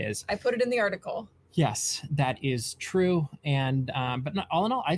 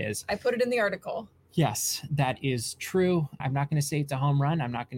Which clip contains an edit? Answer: second; 1 cut; at 3.4 s

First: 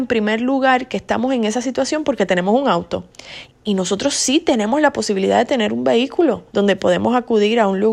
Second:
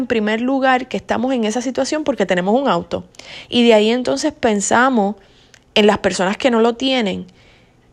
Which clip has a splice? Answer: first; 2 cuts; at 3.5 s, 6.5 s

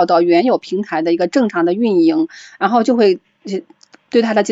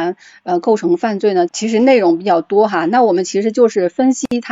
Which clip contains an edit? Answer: second; 1 cut; at 1.5 s

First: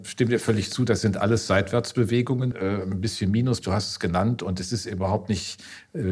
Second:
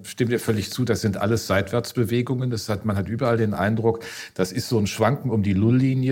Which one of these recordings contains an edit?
first; 2 cuts; at 2.5 s, 3.6 s

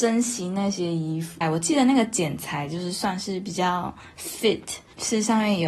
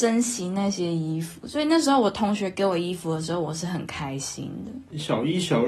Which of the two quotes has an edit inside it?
first; 1 cut; at 1.4 s

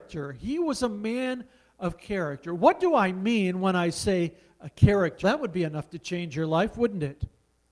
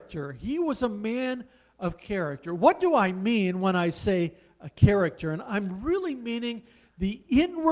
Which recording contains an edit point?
first; 1 cut; at 5.2 s

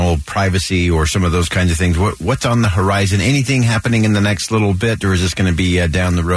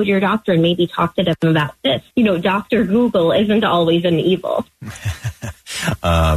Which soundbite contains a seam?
second; 1 cut; at 2.1 s

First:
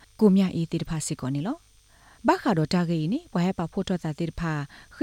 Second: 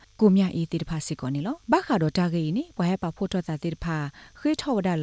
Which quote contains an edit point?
second; 1 cut; at 1.6 s

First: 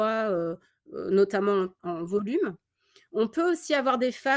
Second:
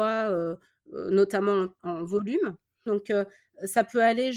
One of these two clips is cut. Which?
second; 1 cut; at 2.9 s

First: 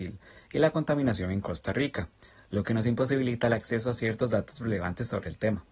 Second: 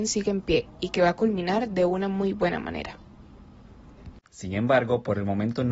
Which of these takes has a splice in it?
second; 1 cut; at 4.3 s

